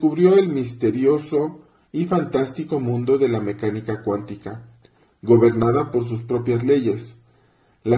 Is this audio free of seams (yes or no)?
yes